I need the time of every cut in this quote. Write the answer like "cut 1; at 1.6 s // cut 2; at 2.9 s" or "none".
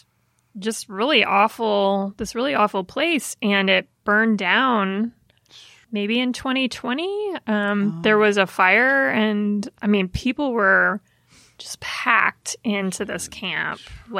none